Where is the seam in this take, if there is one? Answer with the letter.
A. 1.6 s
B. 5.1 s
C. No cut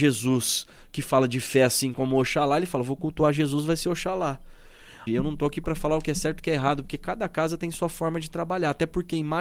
B